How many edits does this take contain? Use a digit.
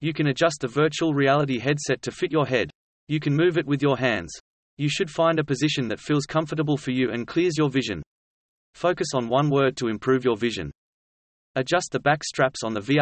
0